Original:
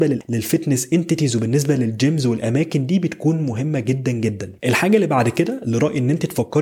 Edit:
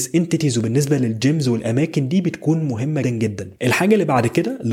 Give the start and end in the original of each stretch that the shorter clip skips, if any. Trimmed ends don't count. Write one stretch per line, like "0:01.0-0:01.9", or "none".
0:03.8-0:04.0